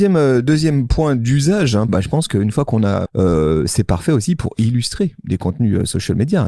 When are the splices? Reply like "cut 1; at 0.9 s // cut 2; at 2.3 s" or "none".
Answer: cut 1; at 1.9 s // cut 2; at 3.1 s